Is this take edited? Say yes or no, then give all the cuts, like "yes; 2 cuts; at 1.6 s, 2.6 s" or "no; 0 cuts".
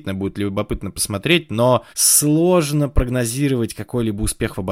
yes; 1 cut; at 1.9 s